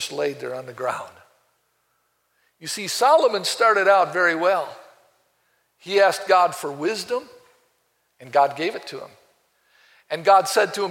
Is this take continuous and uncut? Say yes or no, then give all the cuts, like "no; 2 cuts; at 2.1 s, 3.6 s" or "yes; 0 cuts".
yes; 0 cuts